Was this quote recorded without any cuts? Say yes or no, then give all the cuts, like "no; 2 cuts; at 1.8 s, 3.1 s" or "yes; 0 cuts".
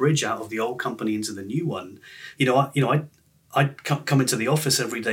yes; 0 cuts